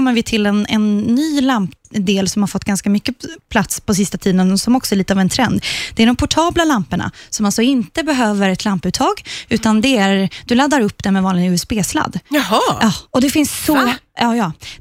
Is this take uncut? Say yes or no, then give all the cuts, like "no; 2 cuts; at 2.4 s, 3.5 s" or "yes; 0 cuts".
yes; 0 cuts